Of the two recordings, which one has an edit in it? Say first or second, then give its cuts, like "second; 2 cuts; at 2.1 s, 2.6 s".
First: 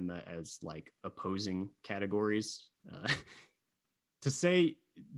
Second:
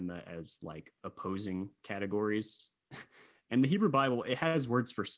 first; 1 cut; at 2.7 s